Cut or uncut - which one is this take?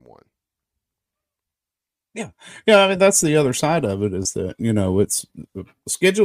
uncut